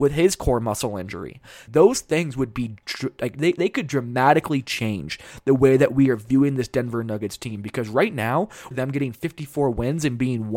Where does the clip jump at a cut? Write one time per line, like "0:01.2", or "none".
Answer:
0:01.7
0:08.7